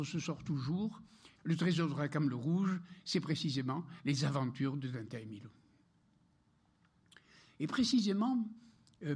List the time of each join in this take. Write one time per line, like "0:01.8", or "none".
0:01.4